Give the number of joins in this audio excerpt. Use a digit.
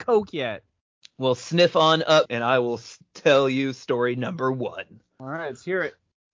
1